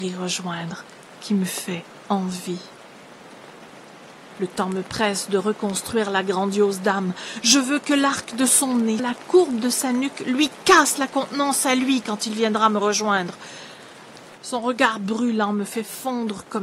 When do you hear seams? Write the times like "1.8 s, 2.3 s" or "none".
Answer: 9.0 s, 14.4 s